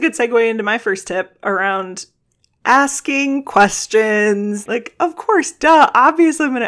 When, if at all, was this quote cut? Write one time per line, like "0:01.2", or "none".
0:04.7